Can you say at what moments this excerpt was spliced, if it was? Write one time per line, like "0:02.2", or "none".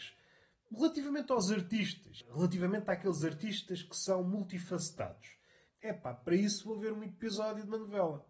0:05.7